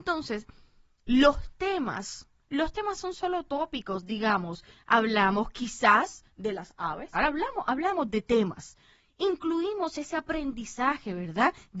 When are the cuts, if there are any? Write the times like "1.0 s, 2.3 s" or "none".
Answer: 7.1 s